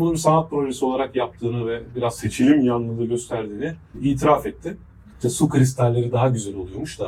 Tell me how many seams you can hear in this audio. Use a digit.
1